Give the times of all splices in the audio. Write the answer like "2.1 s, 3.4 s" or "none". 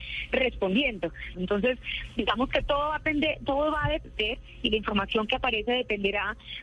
1.3 s